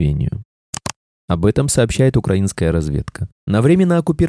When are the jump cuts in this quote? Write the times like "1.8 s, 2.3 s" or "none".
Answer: 1.2 s, 3.3 s